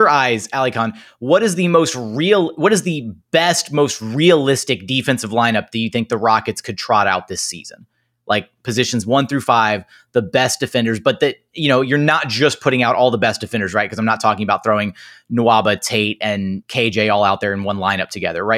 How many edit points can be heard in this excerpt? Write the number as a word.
one